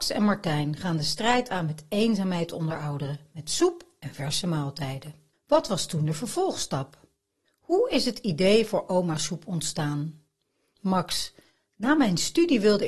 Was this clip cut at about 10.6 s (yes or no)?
no